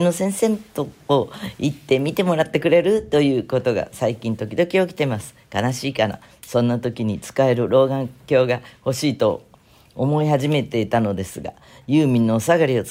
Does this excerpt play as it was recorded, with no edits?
yes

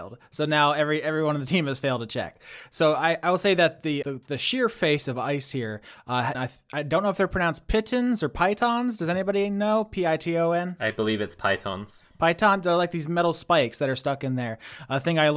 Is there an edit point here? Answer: yes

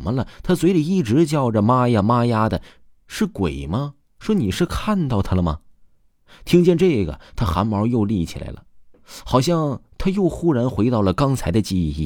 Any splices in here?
no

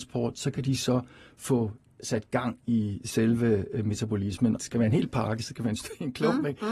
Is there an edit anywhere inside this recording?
yes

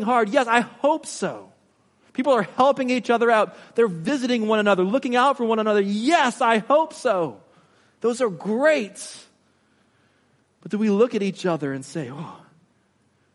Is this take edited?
no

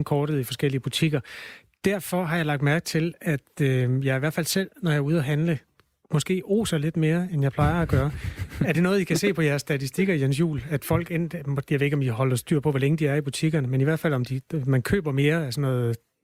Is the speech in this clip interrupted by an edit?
no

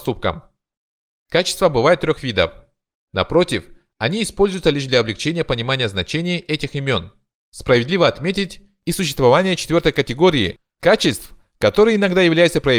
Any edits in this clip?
yes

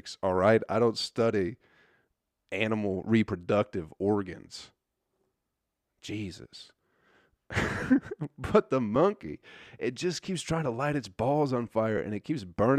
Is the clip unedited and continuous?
yes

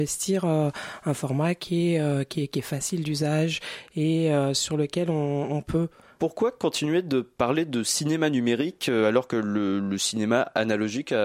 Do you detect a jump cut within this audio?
yes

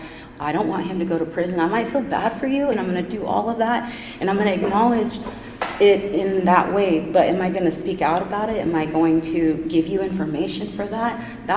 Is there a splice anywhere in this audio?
yes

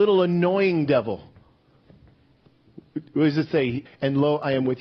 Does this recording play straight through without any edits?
no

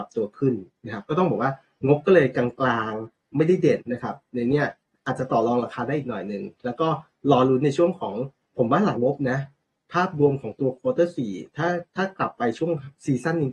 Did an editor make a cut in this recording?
yes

